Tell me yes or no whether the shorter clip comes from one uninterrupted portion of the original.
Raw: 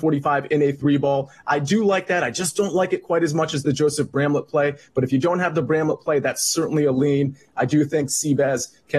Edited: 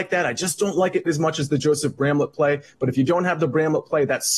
no